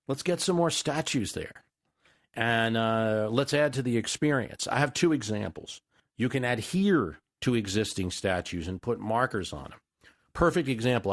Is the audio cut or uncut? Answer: uncut